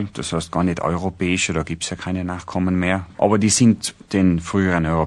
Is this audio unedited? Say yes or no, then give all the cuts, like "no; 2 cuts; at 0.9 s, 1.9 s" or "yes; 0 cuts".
no; 1 cut; at 3.1 s